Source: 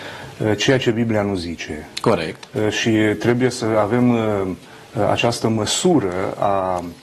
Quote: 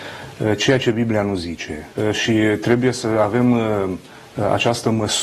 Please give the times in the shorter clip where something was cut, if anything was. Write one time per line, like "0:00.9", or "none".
0:01.9